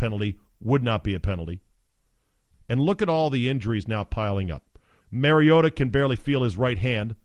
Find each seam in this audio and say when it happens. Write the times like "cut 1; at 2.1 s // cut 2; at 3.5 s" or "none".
cut 1; at 2.5 s // cut 2; at 5.0 s